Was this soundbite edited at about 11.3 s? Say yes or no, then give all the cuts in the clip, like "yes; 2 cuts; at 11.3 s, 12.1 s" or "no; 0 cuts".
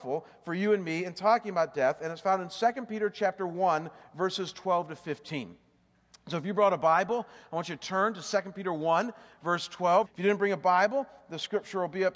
no; 1 cut; at 10.1 s